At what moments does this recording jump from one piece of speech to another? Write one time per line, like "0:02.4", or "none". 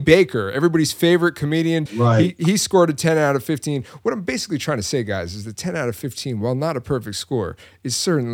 0:01.9